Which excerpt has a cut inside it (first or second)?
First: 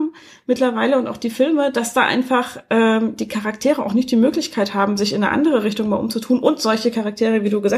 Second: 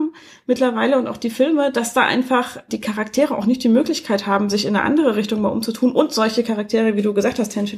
second